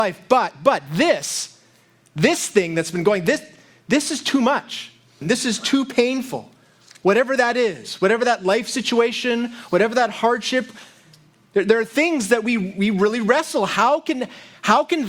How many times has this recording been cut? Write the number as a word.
one